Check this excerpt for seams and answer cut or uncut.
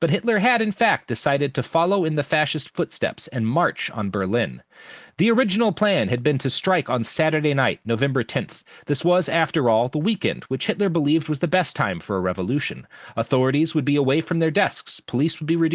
uncut